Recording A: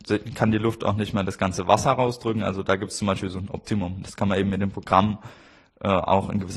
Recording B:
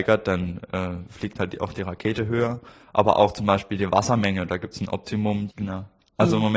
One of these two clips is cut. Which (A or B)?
B